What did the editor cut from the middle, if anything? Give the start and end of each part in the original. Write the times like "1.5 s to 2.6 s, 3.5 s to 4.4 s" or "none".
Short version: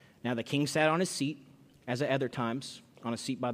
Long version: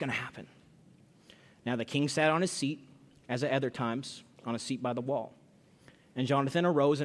none